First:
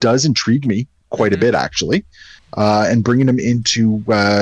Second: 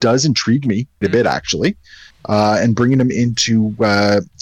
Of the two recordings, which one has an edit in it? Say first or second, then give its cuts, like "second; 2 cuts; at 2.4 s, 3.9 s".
second; 1 cut; at 1.0 s